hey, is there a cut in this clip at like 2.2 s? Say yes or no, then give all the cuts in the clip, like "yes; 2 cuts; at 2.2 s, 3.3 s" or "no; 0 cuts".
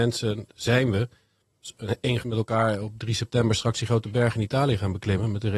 yes; 1 cut; at 2.2 s